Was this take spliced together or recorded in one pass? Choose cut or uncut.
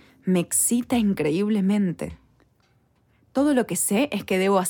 uncut